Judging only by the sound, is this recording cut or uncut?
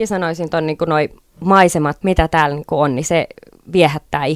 cut